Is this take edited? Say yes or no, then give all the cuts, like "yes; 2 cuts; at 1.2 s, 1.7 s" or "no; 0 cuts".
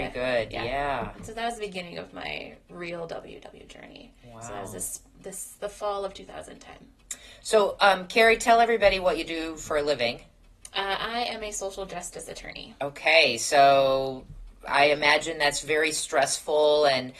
no; 0 cuts